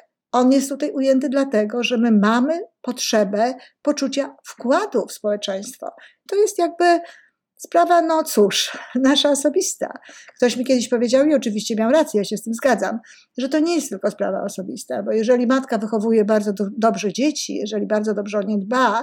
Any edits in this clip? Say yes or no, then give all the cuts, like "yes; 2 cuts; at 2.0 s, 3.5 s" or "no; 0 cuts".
yes; 1 cut; at 6.3 s